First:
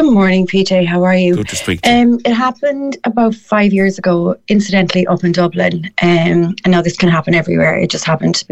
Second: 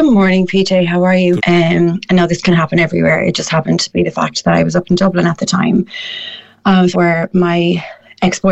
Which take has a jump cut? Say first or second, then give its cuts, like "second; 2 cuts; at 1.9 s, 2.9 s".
second; 2 cuts; at 1.4 s, 6.9 s